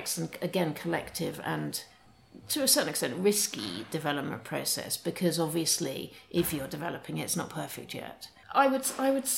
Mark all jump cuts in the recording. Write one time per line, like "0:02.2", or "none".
0:08.4